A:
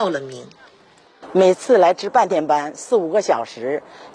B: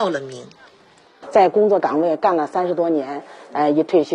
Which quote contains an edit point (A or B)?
B